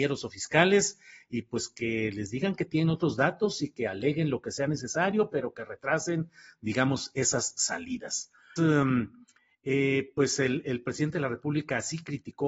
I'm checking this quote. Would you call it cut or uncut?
cut